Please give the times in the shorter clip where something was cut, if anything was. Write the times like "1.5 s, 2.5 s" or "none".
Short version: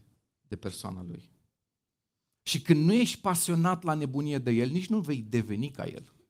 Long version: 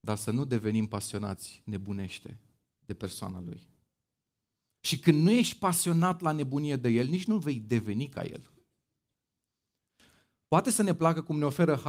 none